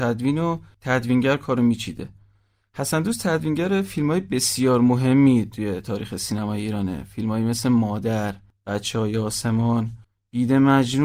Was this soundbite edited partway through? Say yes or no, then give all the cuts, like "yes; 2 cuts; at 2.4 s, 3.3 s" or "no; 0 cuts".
no; 0 cuts